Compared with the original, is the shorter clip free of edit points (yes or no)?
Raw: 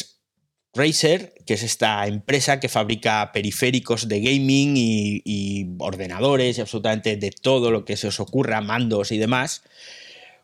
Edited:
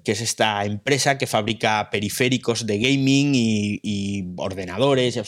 yes